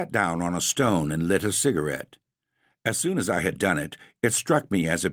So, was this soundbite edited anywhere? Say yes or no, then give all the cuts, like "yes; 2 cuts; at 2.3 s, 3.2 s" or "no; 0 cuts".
no; 0 cuts